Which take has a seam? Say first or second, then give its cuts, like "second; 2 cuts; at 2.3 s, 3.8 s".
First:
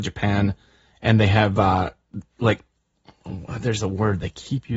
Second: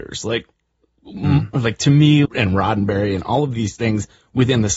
second; 1 cut; at 2.2 s